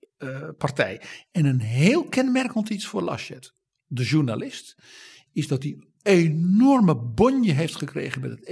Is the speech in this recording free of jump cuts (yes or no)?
yes